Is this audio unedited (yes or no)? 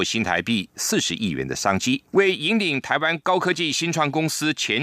no